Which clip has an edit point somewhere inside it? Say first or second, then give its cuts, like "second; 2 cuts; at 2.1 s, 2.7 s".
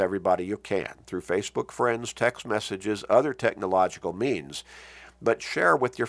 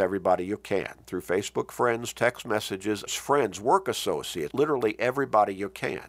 second; 2 cuts; at 3.1 s, 4.5 s